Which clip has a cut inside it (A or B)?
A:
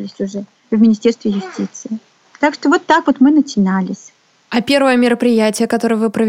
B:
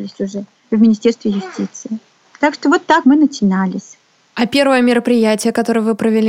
B